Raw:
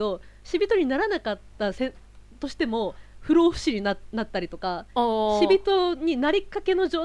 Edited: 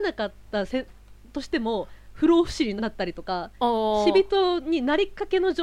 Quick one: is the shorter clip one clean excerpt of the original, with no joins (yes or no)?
no